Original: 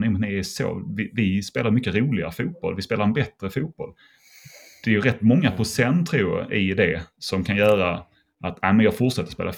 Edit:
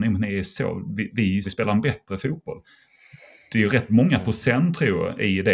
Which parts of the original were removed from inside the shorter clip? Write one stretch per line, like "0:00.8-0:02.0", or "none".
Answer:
0:01.4-0:02.8